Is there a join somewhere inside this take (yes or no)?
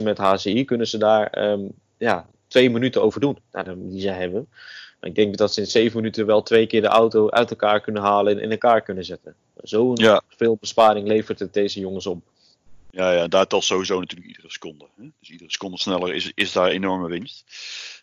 yes